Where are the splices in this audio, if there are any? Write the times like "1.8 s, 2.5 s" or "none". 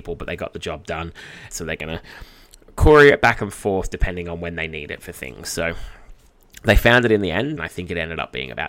1.5 s, 7.6 s